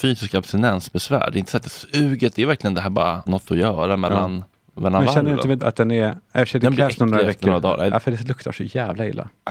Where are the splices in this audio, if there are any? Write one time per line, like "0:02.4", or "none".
0:03.3
0:05.6
0:07.9